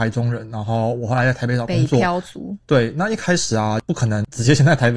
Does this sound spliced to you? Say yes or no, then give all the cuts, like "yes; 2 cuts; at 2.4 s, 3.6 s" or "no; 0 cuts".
no; 0 cuts